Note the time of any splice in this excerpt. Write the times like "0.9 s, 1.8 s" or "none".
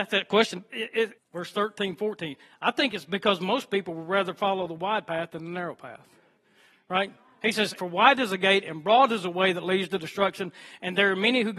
1.2 s, 7.8 s